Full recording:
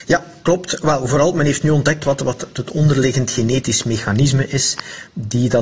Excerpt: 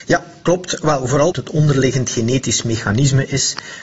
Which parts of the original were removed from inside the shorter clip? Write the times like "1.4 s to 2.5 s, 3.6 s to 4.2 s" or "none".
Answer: 1.3 s to 2.5 s